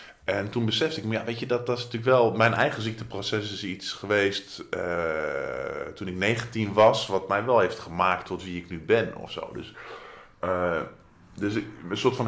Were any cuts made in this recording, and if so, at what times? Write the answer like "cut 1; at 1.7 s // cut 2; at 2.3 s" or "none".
none